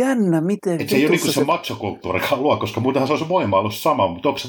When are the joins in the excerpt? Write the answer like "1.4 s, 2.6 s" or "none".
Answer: none